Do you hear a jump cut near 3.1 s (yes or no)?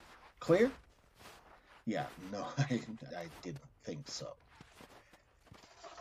yes